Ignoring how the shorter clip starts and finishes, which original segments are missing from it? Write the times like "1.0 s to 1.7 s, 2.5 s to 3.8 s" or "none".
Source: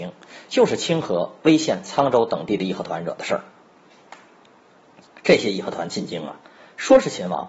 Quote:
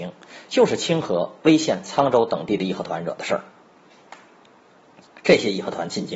none